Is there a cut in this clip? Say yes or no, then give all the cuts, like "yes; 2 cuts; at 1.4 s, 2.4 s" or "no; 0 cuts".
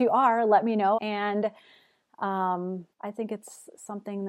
yes; 2 cuts; at 1.0 s, 2.9 s